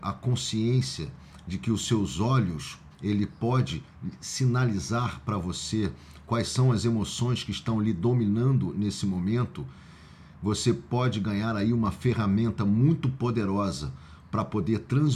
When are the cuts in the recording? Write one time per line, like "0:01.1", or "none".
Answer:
0:02.9